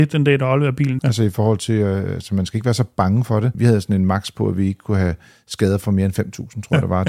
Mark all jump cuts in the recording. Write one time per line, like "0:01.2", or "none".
0:01.0
0:03.5